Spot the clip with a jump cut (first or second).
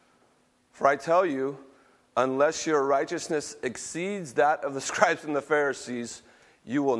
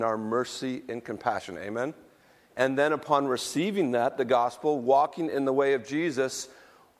second